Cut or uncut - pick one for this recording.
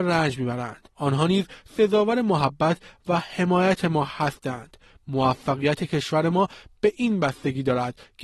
cut